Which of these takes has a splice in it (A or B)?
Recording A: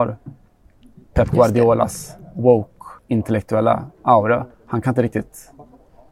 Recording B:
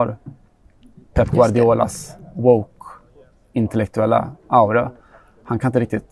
A